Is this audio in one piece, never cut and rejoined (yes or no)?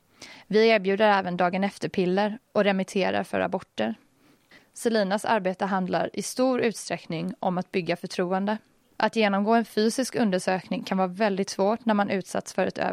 no